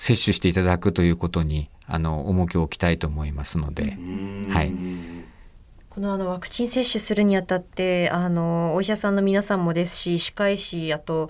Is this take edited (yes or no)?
no